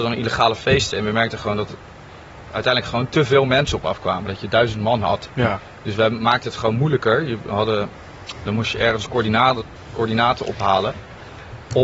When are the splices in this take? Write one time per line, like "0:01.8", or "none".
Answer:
0:08.5